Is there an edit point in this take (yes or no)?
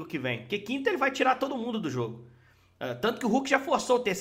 no